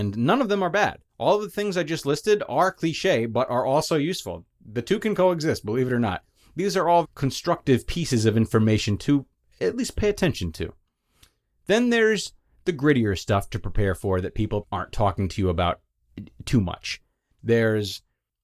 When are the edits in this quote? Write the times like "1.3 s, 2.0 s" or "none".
1.1 s, 7.0 s, 14.6 s